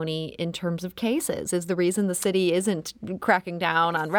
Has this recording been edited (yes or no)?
no